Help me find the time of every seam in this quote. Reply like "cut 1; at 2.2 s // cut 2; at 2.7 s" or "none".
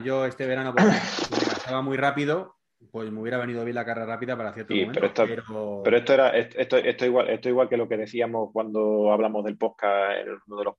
none

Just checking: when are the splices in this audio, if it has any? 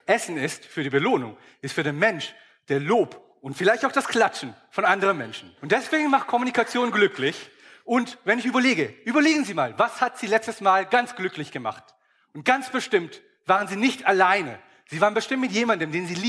cut 1; at 5.6 s

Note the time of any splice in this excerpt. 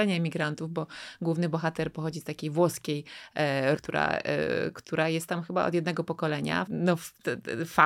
cut 1; at 3.8 s // cut 2; at 6.7 s

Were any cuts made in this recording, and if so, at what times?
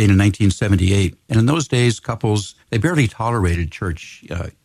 cut 1; at 2.6 s

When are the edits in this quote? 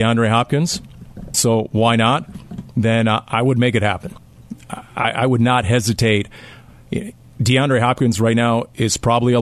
cut 1; at 1.3 s

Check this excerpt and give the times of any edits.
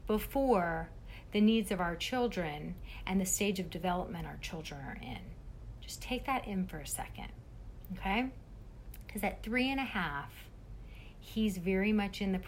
none

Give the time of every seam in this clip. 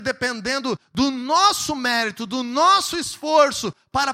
none

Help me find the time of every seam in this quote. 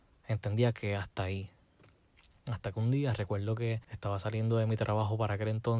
cut 1; at 3.8 s

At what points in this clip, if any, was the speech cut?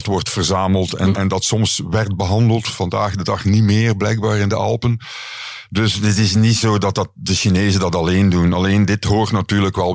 cut 1; at 1.1 s

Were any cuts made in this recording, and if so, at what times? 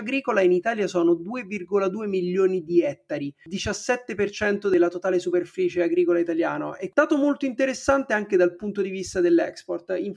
none

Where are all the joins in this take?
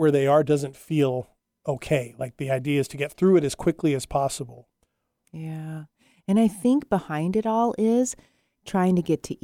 cut 1; at 5.2 s

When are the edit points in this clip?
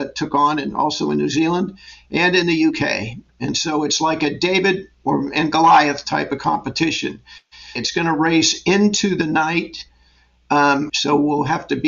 cut 1; at 7.8 s // cut 2; at 10.9 s

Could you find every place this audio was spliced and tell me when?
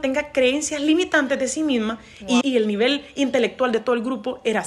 cut 1; at 2.4 s

